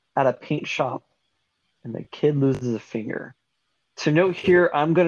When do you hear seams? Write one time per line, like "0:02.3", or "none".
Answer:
0:03.8

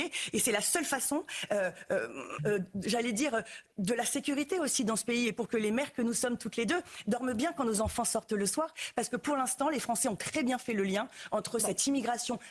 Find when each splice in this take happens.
0:02.4

